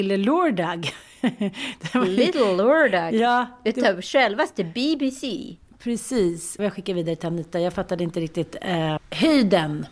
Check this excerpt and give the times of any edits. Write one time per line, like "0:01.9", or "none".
0:06.6
0:09.0